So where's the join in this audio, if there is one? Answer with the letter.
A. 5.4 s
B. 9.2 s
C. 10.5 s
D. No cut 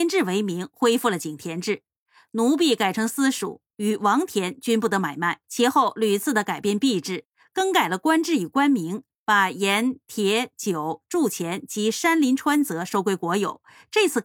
A